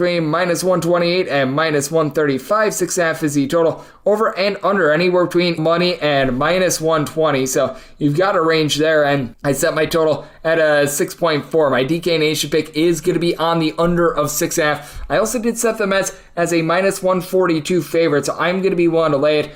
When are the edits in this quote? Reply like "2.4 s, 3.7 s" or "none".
5.6 s